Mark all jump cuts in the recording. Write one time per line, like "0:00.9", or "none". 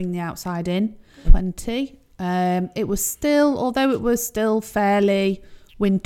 0:01.2